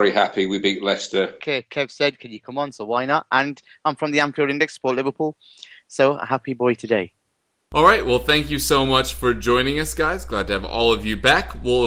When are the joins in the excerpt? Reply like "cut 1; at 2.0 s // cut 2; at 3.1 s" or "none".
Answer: cut 1; at 1.4 s